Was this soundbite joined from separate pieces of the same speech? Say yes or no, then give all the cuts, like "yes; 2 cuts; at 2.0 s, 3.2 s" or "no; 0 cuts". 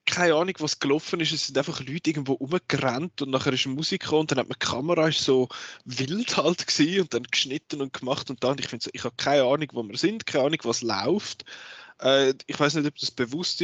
no; 0 cuts